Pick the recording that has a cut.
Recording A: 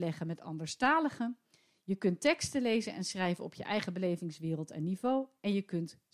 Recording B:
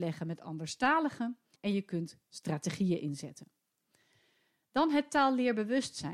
B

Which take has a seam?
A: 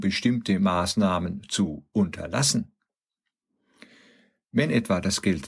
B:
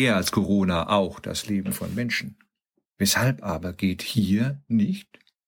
B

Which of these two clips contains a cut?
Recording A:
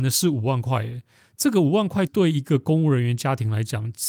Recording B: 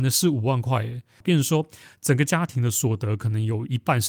B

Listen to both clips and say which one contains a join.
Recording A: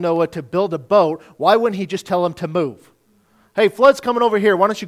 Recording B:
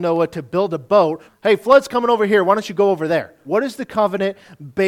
B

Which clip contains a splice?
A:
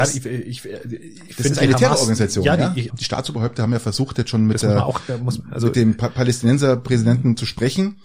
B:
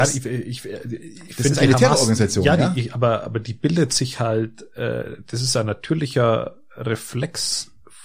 A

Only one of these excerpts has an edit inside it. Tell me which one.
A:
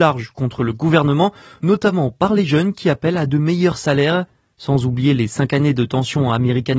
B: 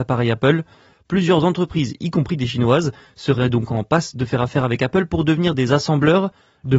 B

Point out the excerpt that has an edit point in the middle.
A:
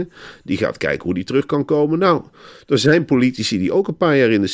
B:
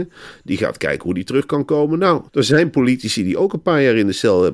B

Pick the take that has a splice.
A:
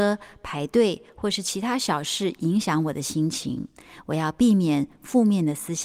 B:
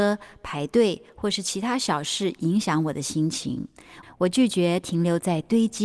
B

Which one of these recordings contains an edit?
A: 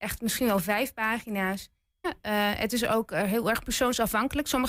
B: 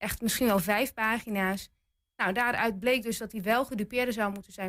A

